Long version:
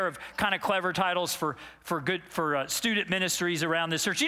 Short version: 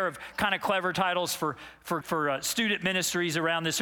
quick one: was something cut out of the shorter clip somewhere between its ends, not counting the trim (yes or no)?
yes